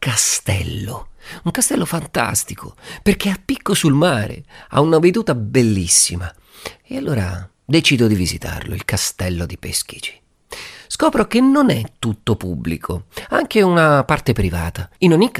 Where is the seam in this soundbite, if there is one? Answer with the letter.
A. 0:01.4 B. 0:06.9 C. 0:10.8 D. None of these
D